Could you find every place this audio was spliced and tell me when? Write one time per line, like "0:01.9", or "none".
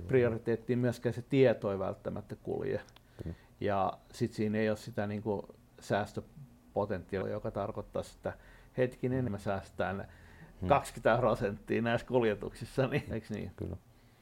0:07.2
0:09.3
0:13.1